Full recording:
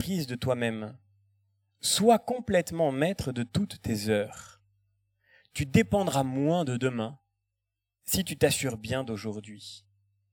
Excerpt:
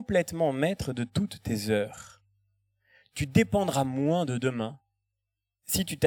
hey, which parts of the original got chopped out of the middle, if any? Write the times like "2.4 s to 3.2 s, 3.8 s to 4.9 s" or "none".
none